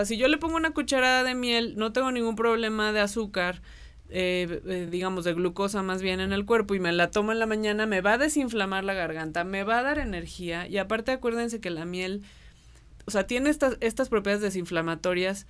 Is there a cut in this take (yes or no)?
no